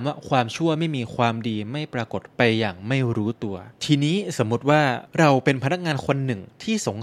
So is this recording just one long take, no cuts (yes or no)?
no